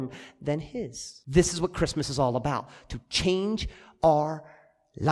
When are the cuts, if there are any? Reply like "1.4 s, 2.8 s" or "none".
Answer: 1.2 s